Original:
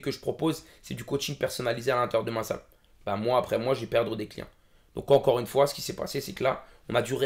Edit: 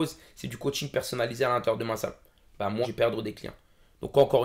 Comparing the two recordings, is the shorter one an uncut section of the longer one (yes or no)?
no